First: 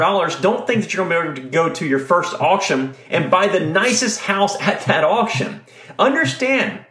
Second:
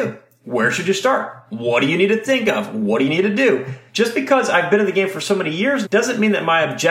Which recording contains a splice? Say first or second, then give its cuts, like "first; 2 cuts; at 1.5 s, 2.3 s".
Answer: second; 2 cuts; at 3.9 s, 5.8 s